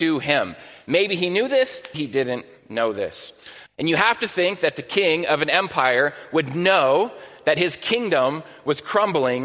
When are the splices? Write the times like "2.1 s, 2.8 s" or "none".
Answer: 1.9 s, 3.7 s